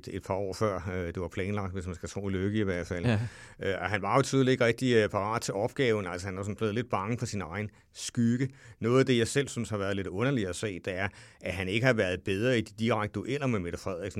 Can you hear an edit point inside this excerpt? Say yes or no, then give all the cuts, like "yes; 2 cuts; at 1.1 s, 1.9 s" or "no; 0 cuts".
no; 0 cuts